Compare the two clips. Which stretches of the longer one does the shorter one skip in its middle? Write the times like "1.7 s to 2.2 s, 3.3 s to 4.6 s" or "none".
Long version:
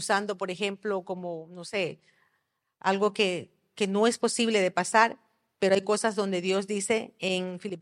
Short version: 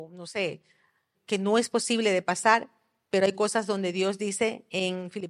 2.5 s to 3.6 s